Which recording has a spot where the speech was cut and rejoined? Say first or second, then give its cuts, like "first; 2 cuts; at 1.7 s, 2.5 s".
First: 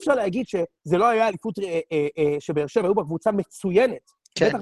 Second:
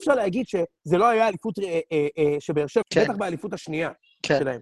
second; 1 cut; at 2.8 s